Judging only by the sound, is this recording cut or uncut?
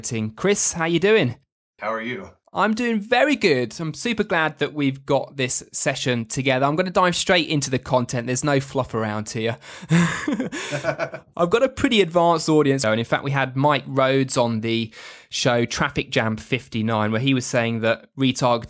cut